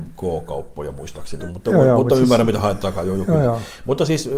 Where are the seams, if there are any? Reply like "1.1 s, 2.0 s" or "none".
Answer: 1.4 s

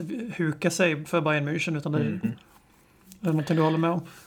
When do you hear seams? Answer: 2.2 s

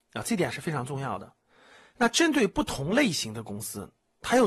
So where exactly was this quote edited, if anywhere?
1.9 s

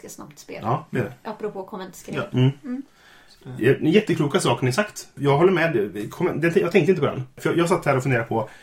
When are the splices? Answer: none

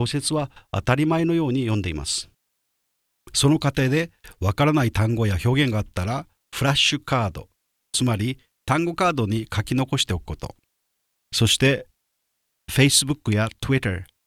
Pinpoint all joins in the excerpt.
none

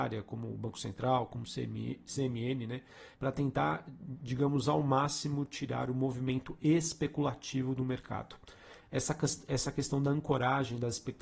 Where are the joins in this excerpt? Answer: 2.0 s, 3.1 s

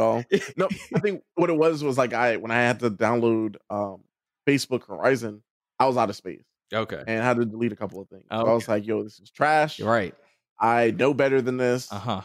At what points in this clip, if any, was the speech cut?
none

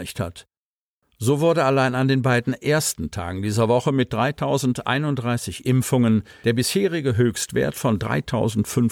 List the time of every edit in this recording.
1.0 s

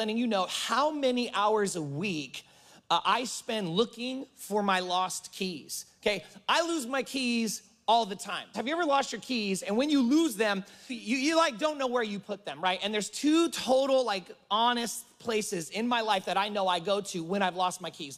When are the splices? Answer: 8.5 s, 10.9 s

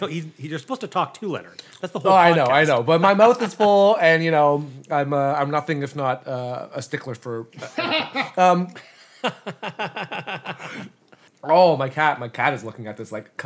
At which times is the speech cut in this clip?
none

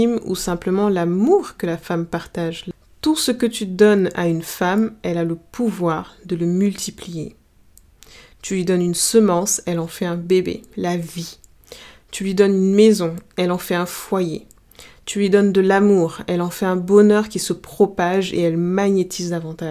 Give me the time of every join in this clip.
none

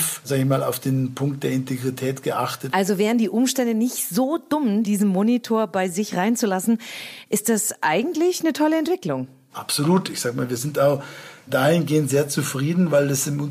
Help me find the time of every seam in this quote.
4.8 s

